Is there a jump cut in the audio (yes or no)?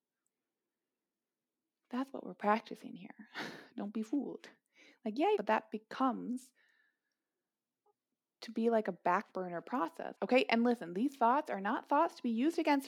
yes